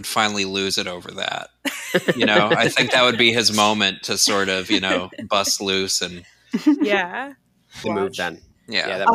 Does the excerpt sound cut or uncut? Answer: cut